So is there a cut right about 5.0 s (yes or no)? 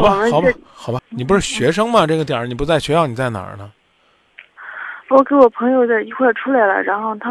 no